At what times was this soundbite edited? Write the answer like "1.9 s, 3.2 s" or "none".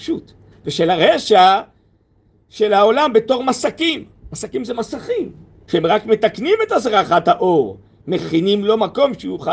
5.7 s

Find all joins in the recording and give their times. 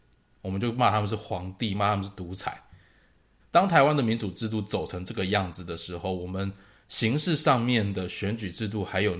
3.4 s

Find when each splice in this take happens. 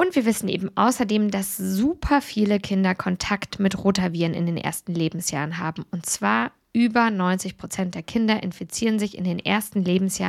none

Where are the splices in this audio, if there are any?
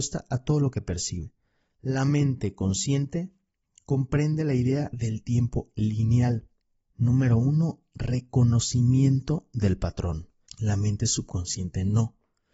6.9 s, 10.5 s

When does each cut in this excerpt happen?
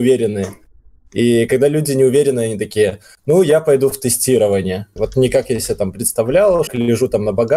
5.0 s, 6.7 s

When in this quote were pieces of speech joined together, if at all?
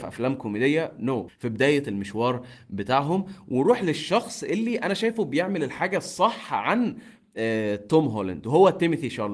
1.3 s

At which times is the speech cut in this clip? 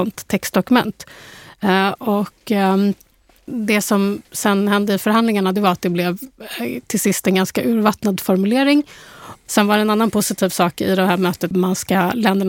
2.0 s, 9.5 s, 11.5 s

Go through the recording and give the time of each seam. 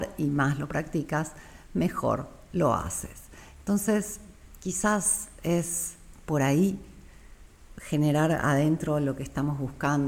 none

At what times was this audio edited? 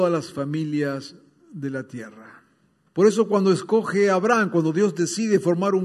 2.9 s

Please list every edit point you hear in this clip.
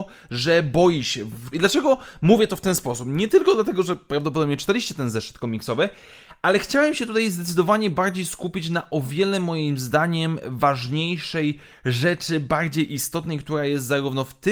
1.5 s

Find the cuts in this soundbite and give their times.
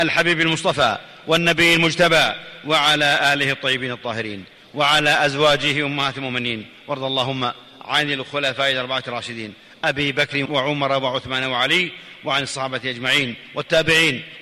10.5 s

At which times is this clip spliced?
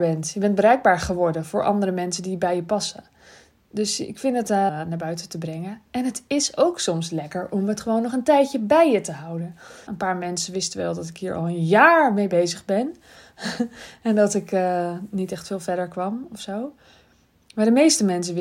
4.7 s, 9.9 s

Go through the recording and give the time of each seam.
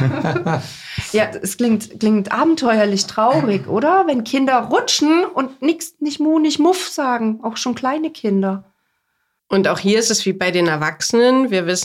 9.4 s

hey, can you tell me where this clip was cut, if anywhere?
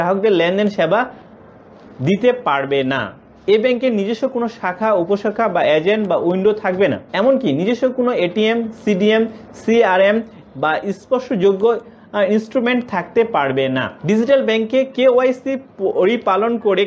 7.1 s, 14.0 s

